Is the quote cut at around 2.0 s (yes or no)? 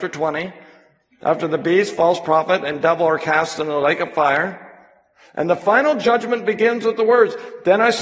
no